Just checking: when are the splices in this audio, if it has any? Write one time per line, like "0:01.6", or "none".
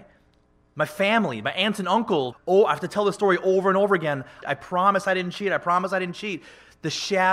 0:02.3
0:04.4